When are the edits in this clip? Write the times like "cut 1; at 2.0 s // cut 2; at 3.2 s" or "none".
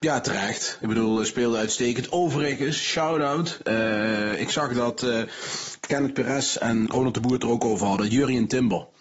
cut 1; at 6.9 s